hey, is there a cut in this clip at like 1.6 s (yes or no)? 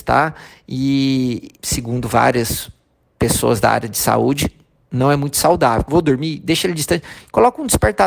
yes